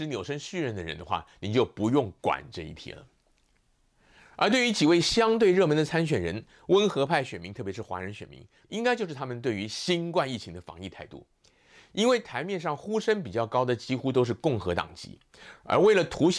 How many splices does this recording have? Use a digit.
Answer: 1